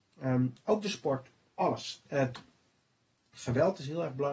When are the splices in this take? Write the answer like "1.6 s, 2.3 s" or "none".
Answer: none